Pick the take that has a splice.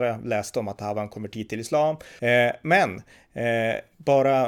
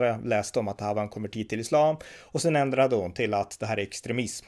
first; 1 cut; at 2.2 s

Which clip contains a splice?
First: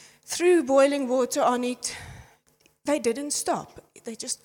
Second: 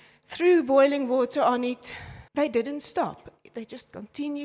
second; 1 cut; at 2.3 s

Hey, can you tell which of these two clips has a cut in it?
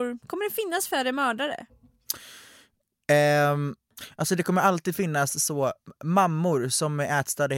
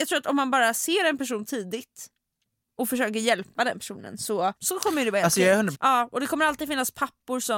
second; 2 cuts; at 4.6 s, 5.7 s

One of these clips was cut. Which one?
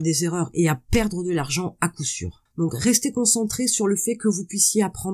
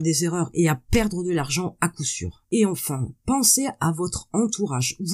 first; 1 cut; at 2.5 s

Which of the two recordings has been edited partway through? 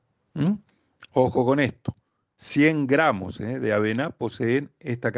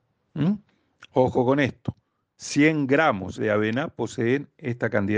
second; 1 cut; at 3.4 s

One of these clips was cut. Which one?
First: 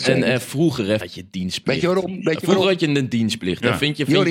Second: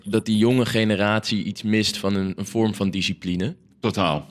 first; 1 cut; at 1.0 s

